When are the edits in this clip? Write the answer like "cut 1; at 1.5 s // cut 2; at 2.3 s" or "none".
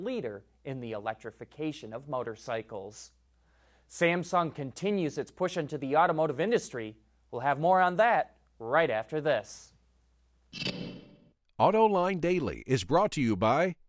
none